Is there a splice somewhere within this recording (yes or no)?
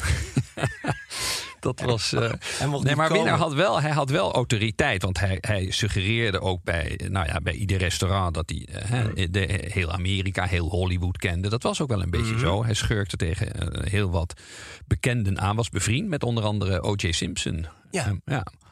no